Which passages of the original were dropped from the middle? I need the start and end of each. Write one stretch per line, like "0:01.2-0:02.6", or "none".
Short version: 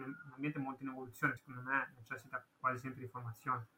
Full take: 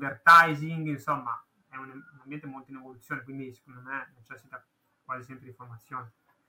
0:03.2-0:03.6
0:04.7-0:05.0

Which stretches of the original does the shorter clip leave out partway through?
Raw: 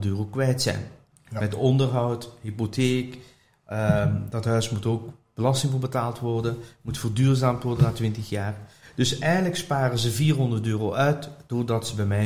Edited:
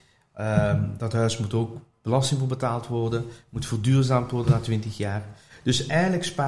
none

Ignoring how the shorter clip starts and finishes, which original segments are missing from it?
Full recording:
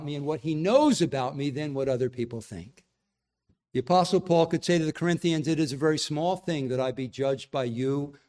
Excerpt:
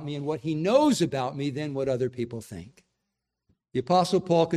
none

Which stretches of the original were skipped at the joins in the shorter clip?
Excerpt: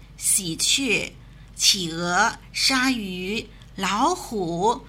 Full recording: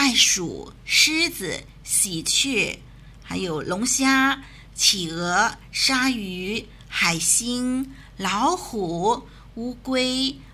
0:03.2-0:04.7
0:06.9-0:08.1

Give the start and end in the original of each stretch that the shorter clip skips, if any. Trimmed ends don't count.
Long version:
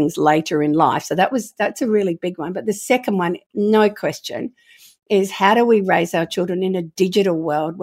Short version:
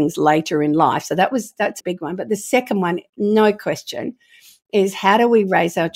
0:01.8-0:02.2

